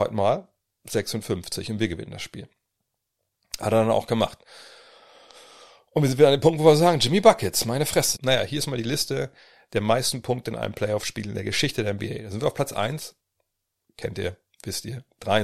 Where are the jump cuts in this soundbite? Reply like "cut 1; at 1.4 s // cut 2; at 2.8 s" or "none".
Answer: cut 1; at 8.2 s